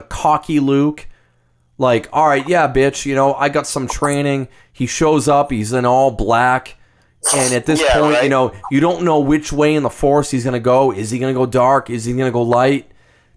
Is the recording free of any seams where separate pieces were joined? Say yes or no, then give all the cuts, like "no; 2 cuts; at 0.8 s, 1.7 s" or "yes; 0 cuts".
yes; 0 cuts